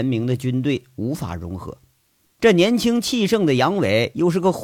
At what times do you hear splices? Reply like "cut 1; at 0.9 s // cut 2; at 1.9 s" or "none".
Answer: cut 1; at 2.4 s